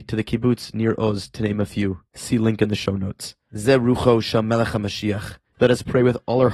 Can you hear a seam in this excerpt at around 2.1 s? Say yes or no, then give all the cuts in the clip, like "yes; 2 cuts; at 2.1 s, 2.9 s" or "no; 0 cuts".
yes; 3 cuts; at 2.1 s, 3.5 s, 5.5 s